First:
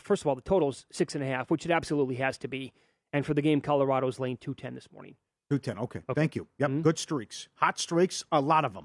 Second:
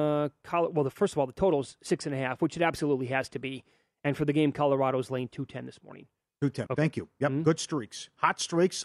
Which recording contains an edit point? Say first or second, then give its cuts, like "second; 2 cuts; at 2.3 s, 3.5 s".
second; 1 cut; at 6.7 s